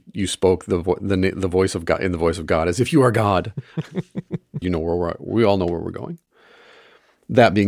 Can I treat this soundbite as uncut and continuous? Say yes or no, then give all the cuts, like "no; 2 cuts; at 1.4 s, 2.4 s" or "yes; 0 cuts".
no; 1 cut; at 4.6 s